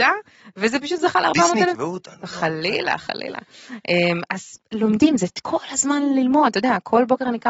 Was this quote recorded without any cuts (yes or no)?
yes